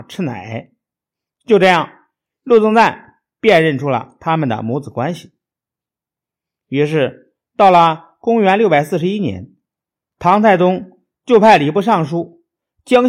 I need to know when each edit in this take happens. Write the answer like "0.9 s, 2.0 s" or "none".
none